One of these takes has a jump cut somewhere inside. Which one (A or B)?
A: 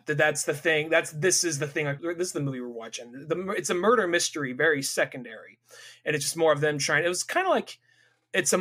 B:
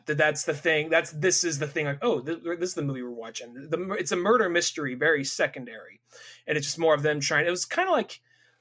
A